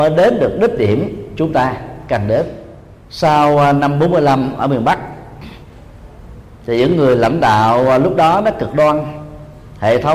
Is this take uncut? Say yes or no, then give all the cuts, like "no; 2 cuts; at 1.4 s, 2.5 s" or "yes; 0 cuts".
yes; 0 cuts